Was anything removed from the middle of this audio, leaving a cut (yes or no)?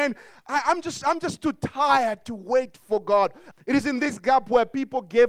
yes